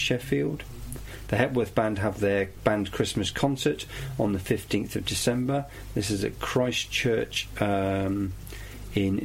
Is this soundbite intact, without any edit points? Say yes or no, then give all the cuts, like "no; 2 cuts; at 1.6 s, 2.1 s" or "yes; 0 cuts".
yes; 0 cuts